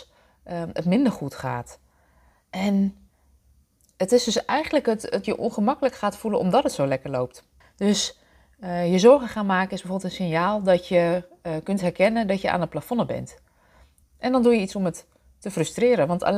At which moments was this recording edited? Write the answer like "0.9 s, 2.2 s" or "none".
5.2 s, 7.6 s, 14.0 s